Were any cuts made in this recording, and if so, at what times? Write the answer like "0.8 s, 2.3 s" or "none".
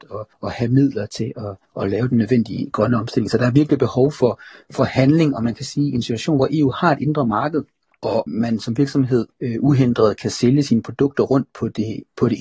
none